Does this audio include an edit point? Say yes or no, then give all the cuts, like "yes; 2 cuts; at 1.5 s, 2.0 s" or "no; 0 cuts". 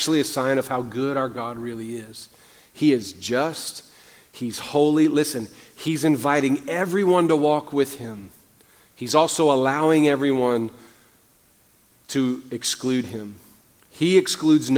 no; 0 cuts